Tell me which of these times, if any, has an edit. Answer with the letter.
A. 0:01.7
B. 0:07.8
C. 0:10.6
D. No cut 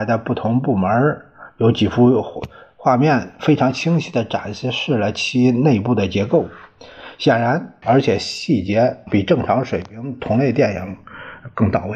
B